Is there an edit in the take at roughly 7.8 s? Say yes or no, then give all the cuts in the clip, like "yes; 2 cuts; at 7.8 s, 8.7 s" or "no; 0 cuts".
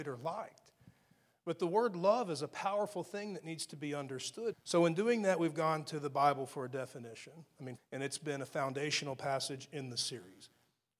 yes; 2 cuts; at 4.5 s, 7.8 s